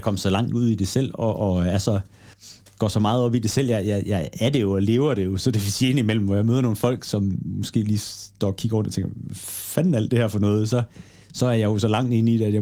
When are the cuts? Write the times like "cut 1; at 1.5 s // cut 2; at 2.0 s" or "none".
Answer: none